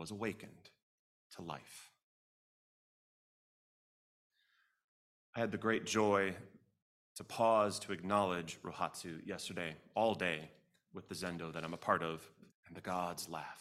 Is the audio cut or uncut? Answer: cut